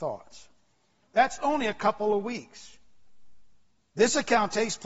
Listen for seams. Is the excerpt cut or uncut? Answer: cut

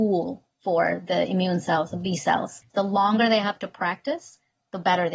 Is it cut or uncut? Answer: cut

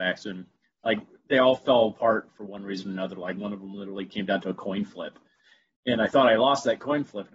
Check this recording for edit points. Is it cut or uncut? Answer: uncut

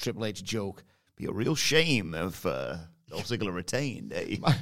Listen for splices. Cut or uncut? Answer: cut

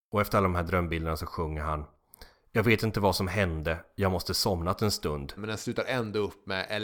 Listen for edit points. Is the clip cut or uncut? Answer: cut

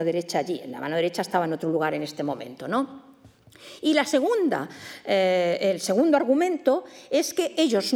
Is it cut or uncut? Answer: uncut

